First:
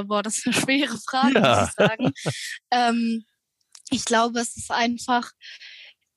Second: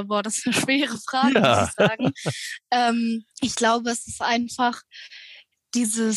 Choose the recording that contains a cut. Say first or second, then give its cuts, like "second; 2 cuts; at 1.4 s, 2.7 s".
second; 1 cut; at 3.3 s